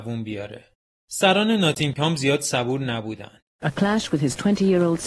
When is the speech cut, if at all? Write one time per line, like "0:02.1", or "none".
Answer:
0:03.6